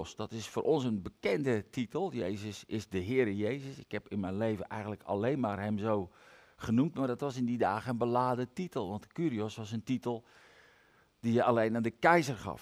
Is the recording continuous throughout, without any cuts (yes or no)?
yes